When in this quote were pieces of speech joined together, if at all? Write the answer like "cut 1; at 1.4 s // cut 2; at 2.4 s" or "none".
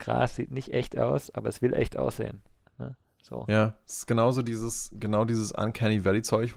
none

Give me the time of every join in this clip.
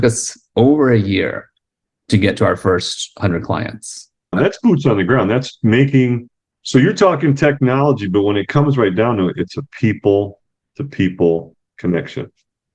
cut 1; at 4.3 s

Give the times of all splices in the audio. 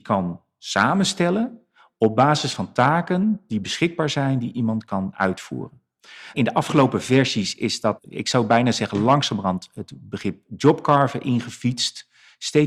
cut 1; at 6.3 s // cut 2; at 8.0 s

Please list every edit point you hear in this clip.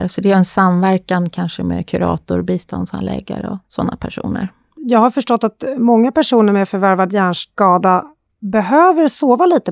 cut 1; at 3.6 s

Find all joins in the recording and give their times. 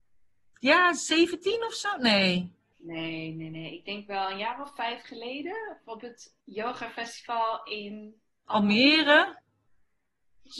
none

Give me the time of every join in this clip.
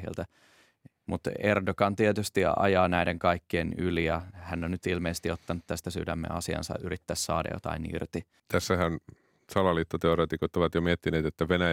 cut 1; at 8.4 s

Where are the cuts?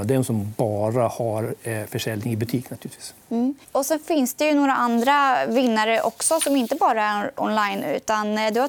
cut 1; at 3.6 s

